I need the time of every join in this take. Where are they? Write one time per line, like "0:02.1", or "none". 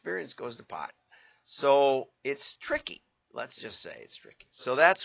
none

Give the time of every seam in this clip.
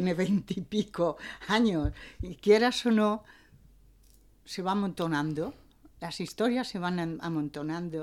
none

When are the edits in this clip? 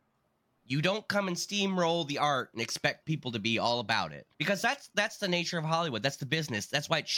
0:03.0
0:04.3

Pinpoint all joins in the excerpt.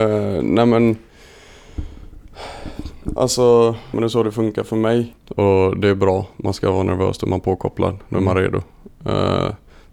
0:03.9
0:05.1

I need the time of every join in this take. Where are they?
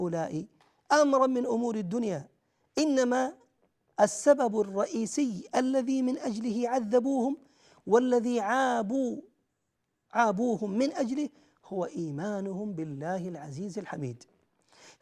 none

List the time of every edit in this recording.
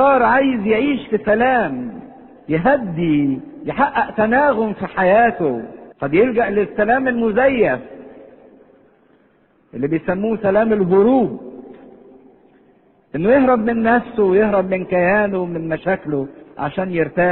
0:05.9

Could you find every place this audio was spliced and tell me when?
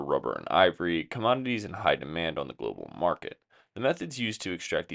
none

